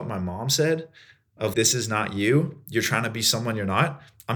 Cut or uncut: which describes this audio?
cut